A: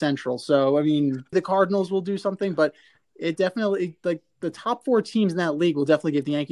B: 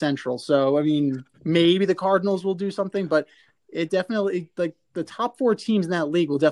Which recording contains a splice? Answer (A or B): A